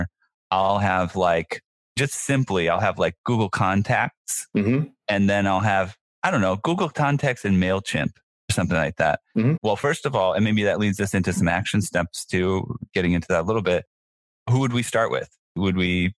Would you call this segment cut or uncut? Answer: cut